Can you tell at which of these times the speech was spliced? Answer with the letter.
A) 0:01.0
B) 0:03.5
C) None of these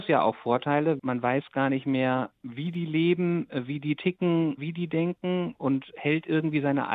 A